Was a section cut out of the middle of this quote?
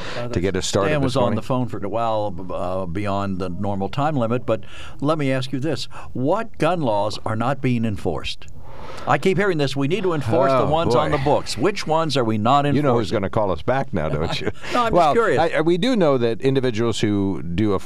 yes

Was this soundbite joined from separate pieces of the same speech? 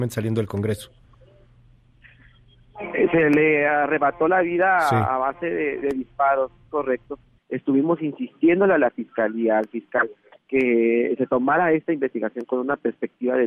yes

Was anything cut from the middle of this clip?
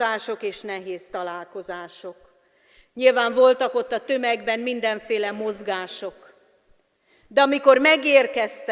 no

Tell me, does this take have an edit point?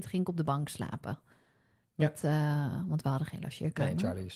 no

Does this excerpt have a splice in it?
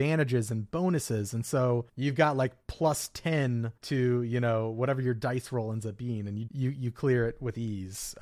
yes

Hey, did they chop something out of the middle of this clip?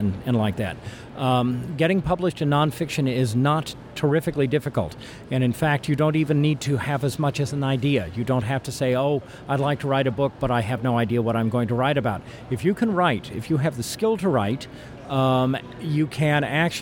no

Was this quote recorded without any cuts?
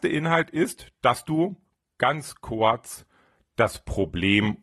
yes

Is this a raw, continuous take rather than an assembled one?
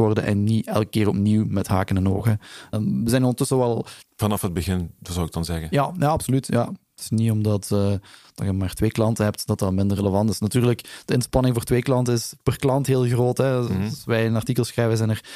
no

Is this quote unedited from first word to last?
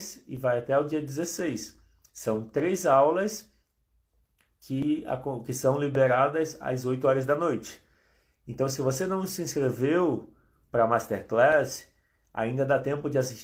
yes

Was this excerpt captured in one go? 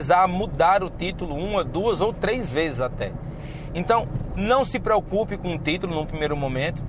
yes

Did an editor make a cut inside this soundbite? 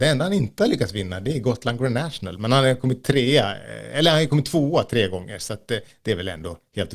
no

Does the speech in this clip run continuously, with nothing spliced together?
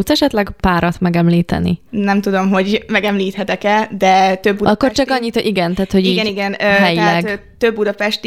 no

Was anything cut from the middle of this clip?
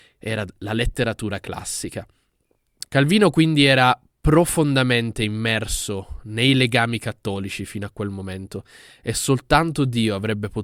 yes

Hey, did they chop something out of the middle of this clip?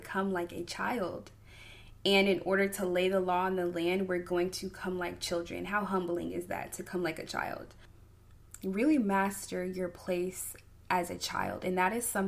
no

